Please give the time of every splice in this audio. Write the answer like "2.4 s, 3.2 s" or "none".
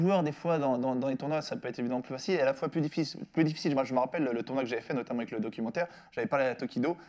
none